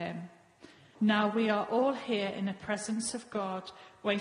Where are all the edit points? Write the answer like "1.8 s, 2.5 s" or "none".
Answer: 0.9 s